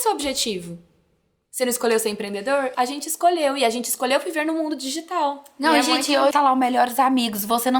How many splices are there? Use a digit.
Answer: 2